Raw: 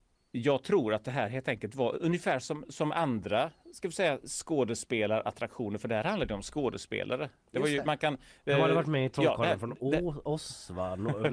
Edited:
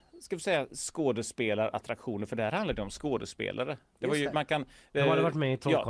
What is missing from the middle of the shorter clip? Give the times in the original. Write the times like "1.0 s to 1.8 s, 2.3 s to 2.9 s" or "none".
none

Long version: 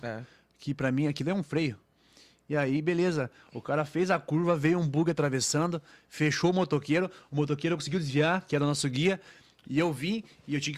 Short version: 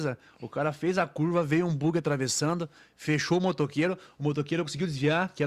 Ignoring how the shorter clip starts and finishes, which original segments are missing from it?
none

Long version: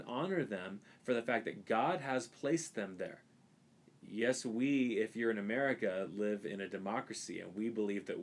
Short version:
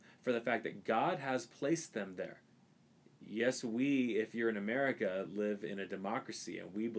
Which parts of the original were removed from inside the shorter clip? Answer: none

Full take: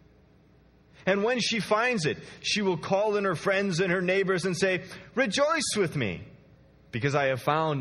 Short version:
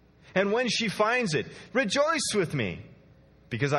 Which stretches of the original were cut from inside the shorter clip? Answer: 2.4 s to 5.1 s

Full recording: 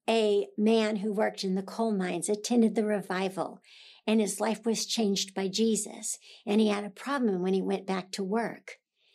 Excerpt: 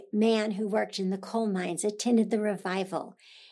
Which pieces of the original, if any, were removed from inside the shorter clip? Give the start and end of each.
none

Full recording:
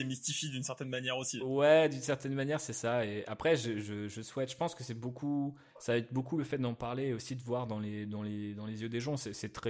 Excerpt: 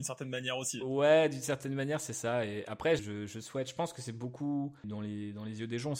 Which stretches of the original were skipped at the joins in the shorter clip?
3.6 s to 3.8 s, 5.7 s to 8.1 s

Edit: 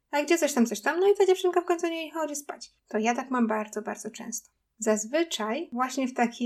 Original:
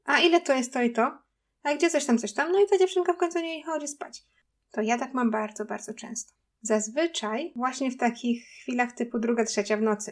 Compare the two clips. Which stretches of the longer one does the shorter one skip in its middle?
4.3 s to 4.6 s

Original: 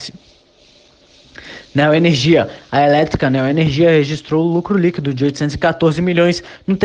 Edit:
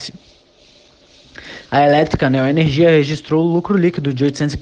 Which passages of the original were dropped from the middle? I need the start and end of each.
1.7 s to 2.7 s

